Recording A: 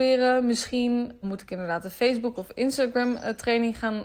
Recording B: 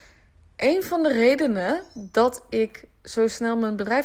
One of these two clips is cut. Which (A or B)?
A